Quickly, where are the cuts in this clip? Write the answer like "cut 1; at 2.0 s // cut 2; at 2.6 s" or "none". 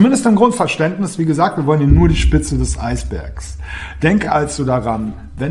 none